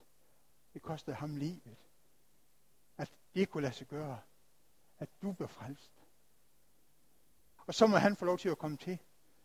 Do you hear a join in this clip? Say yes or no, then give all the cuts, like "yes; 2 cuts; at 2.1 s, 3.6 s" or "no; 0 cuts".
yes; 1 cut; at 7.6 s